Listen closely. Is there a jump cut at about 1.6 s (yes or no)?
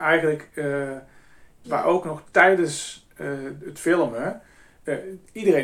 yes